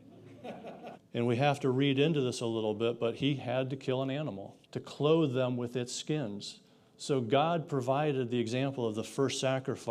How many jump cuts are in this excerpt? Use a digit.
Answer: 2